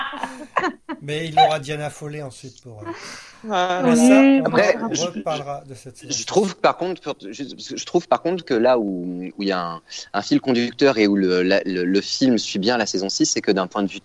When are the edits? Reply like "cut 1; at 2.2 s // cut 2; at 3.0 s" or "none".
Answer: none

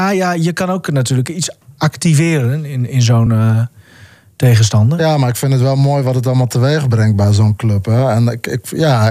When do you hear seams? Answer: none

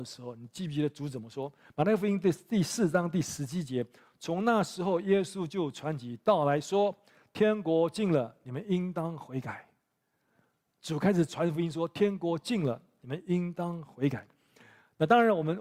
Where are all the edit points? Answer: none

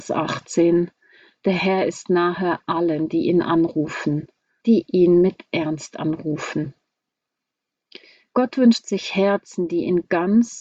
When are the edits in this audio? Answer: cut 1; at 4.6 s

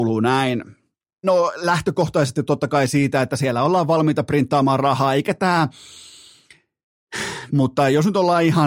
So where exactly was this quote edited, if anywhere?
cut 1; at 1.2 s // cut 2; at 7.5 s

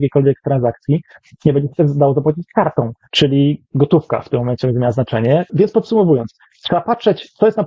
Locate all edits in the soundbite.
cut 1; at 3.1 s // cut 2; at 5.5 s

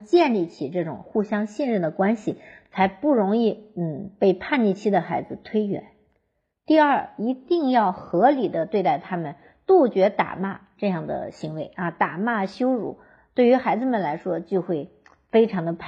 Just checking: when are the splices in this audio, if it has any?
none

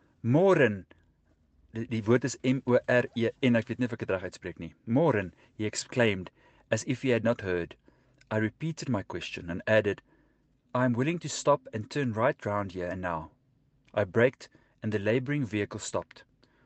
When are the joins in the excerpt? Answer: none

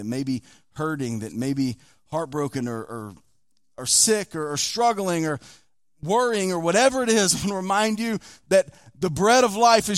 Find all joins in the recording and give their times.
cut 1; at 2.8 s

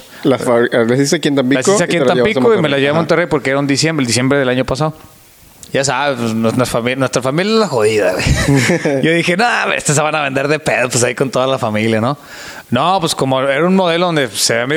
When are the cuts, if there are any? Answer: cut 1; at 5.7 s

